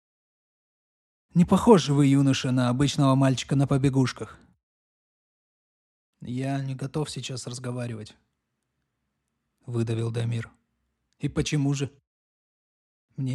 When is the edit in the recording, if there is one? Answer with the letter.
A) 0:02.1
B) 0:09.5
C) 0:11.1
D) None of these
C